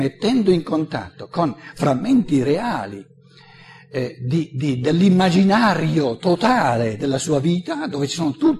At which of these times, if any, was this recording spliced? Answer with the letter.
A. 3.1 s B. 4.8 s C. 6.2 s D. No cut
D